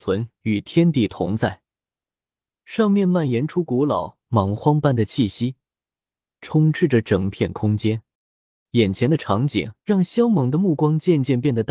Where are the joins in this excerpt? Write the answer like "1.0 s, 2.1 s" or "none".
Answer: 8.7 s, 9.8 s